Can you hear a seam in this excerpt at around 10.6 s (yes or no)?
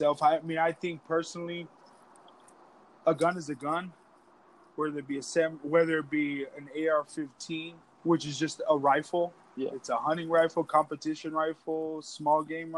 no